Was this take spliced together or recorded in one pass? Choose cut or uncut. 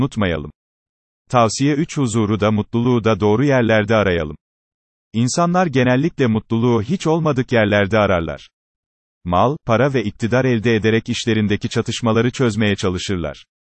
cut